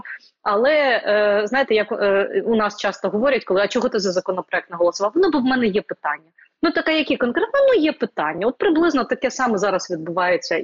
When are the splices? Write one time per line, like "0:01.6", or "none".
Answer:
none